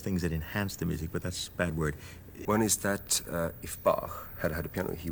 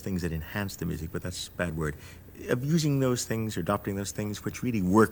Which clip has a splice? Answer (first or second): first